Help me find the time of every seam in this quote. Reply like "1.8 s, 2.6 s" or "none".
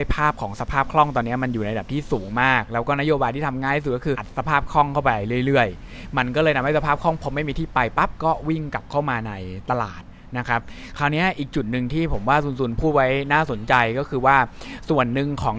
4.1 s